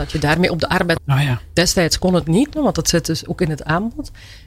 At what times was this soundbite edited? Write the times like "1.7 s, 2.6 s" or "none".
0.9 s, 2.5 s